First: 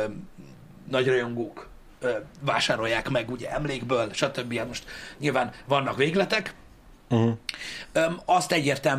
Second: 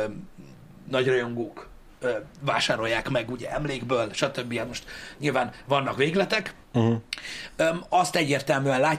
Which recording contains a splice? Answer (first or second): second